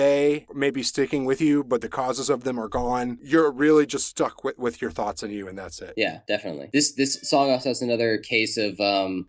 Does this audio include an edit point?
no; 0 cuts

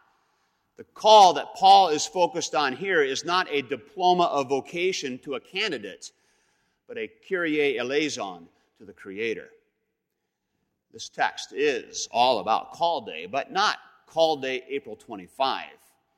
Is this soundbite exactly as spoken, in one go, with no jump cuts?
yes; 0 cuts

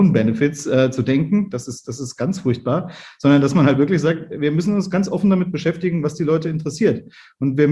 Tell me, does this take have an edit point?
no; 0 cuts

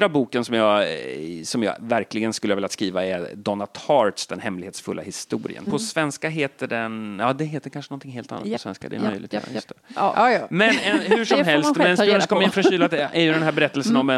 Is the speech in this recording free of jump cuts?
no; 1 cut; at 5.7 s

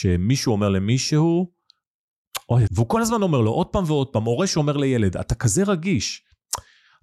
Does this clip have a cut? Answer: yes; 1 cut; at 2.7 s

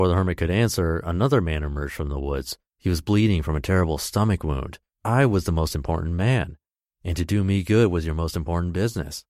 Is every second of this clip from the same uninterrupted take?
no; 2 cuts; at 2.7 s, 4.9 s

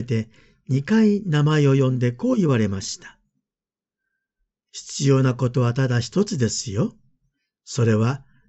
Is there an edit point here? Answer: no; 0 cuts

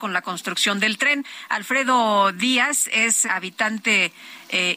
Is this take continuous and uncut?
no; 1 cut; at 3.2 s

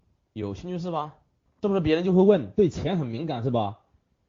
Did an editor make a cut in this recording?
yes; 1 cut; at 1.5 s

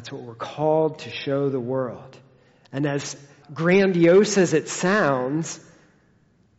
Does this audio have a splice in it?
yes; 1 cut; at 3.4 s

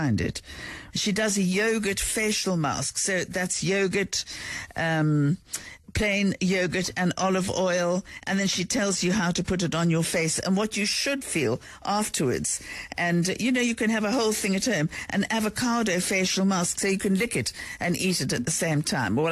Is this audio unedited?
no; 2 cuts; at 0.9 s, 5.8 s

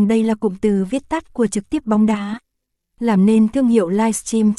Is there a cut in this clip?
yes; 1 cut; at 2.8 s

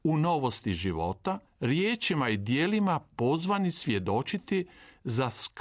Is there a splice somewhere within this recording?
yes; 1 cut; at 1.5 s

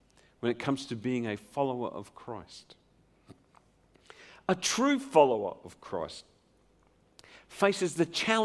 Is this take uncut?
yes; 0 cuts

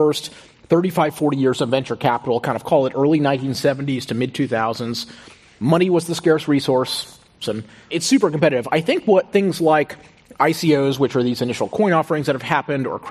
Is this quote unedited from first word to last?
no; 1 cut; at 7.4 s

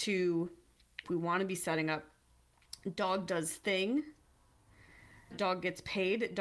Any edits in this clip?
yes; 2 cuts; at 1.0 s, 5.3 s

